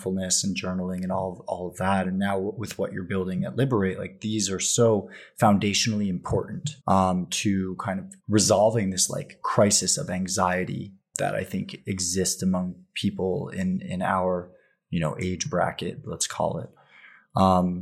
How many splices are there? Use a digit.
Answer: 3